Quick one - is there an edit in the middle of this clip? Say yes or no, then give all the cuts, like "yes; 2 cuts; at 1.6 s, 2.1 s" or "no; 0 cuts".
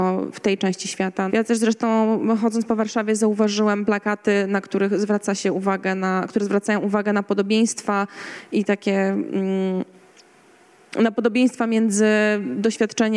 yes; 1 cut; at 1.3 s